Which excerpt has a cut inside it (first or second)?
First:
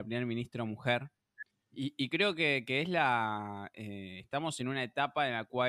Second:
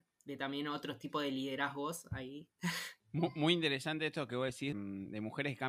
second